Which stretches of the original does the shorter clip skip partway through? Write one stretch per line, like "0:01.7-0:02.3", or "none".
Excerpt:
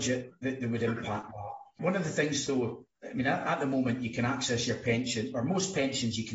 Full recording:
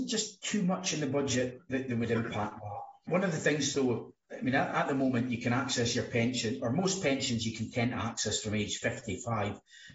none